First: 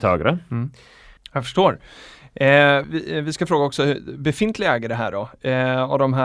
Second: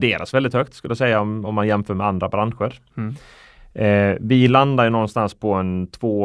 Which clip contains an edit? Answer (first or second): first